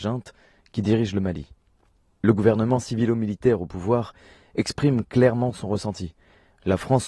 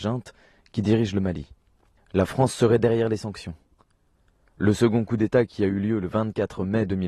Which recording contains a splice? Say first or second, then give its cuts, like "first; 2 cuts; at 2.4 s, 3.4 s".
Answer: second; 1 cut; at 2.0 s